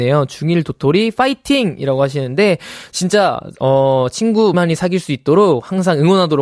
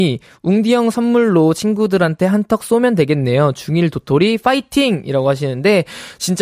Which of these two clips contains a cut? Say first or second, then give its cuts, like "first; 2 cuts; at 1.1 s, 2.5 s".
first; 1 cut; at 4.5 s